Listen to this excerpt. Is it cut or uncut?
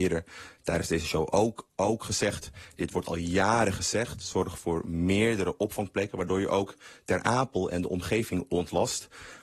uncut